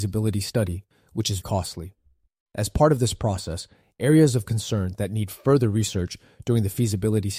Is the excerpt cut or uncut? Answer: cut